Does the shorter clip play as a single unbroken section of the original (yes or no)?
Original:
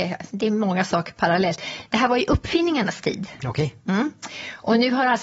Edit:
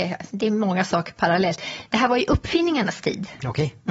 yes